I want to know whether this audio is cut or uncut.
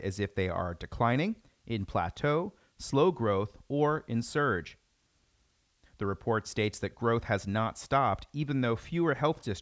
uncut